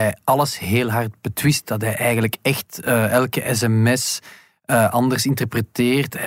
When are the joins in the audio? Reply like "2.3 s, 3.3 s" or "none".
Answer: none

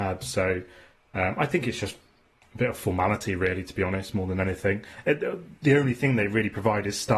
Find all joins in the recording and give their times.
none

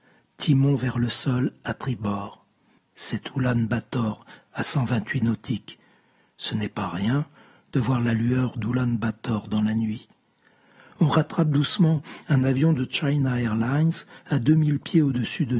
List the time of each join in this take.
2.8 s

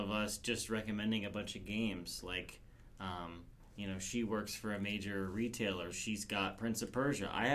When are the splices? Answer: 5.9 s

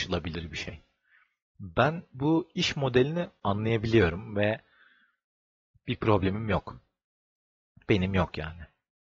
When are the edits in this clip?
none

